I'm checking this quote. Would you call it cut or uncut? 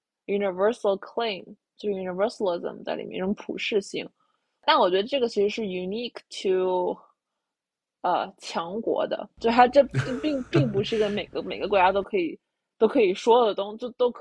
uncut